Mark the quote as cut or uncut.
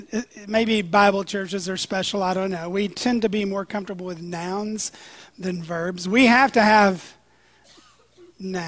uncut